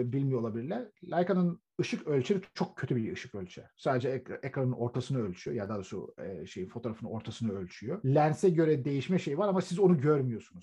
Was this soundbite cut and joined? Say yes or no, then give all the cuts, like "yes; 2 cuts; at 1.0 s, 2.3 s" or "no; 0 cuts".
no; 0 cuts